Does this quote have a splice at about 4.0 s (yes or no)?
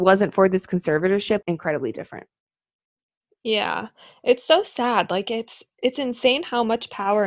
no